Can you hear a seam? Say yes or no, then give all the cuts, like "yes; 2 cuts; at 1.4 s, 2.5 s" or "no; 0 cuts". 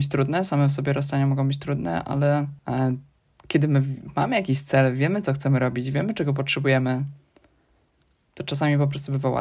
yes; 1 cut; at 2.6 s